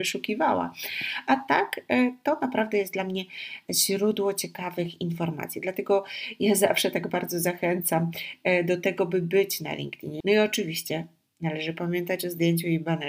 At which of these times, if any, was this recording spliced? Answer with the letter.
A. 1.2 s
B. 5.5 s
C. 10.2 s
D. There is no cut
C